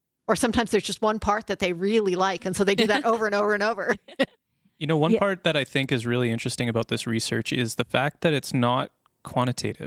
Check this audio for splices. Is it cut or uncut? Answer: uncut